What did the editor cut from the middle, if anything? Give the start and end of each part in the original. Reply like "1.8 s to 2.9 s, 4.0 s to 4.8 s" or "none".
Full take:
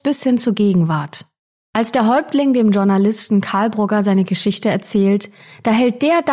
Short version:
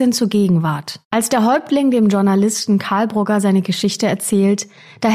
1.3 s to 1.7 s